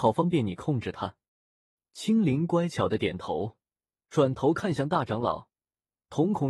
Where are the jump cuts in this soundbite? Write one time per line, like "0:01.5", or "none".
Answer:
0:01.3